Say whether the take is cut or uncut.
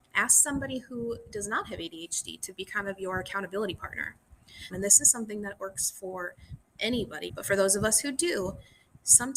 cut